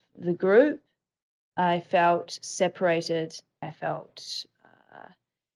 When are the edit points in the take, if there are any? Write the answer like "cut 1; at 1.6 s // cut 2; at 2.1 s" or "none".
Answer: cut 1; at 3.6 s